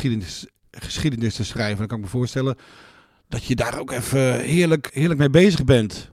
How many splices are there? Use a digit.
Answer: 1